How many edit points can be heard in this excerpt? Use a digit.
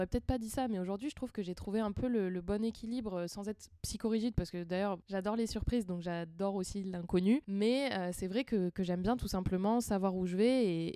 0